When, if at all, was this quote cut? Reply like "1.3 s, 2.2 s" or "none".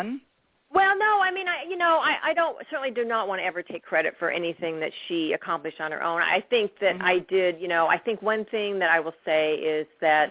none